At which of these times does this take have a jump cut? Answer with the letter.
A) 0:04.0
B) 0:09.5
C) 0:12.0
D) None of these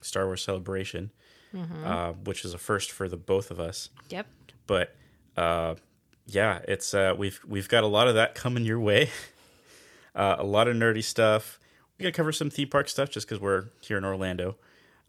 C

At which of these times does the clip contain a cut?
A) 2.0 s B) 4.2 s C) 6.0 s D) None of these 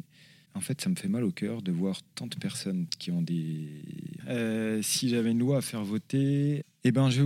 B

